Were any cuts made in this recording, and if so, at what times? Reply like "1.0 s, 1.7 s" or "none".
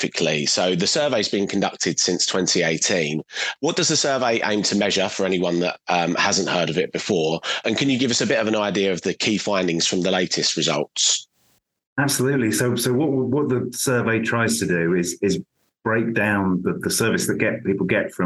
none